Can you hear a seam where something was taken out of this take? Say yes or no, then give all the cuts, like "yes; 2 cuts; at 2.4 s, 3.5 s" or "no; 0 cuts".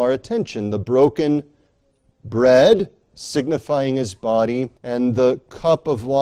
yes; 1 cut; at 4.8 s